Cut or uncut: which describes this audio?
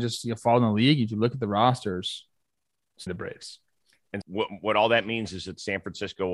cut